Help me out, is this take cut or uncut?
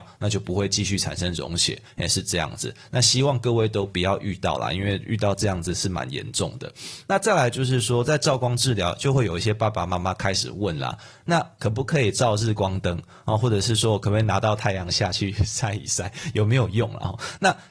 uncut